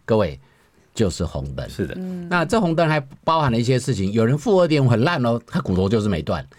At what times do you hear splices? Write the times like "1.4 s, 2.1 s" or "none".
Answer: none